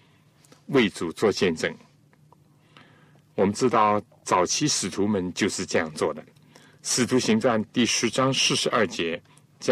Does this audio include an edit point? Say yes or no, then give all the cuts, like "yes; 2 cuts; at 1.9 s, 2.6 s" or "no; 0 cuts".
no; 0 cuts